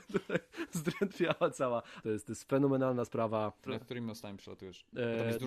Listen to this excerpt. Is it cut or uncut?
cut